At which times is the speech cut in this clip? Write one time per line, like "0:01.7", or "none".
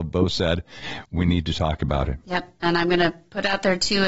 0:02.2